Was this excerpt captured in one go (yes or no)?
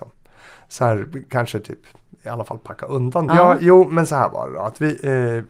no